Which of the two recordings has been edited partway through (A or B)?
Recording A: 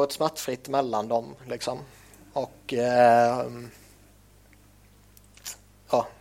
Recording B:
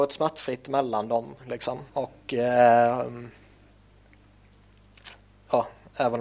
B